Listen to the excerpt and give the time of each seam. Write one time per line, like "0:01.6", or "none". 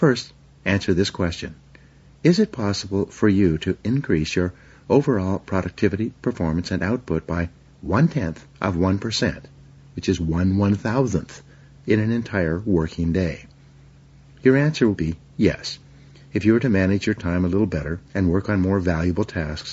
0:14.9
0:18.1

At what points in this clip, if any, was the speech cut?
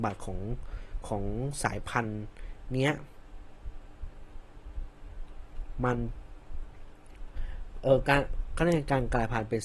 none

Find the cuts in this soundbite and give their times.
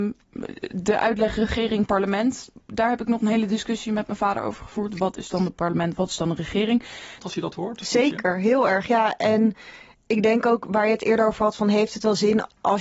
0:07.2

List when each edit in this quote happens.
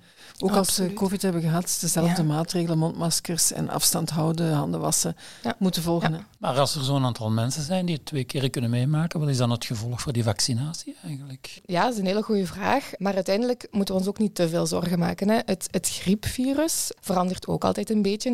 0:06.4

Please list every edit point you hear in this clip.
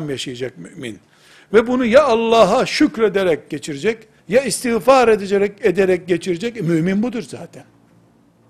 0:04.2

